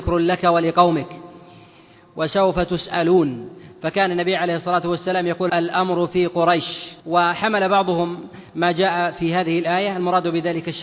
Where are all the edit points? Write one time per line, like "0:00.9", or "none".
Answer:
0:05.5
0:07.0